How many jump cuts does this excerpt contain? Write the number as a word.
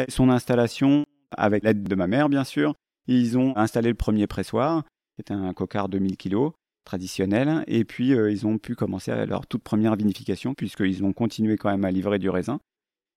one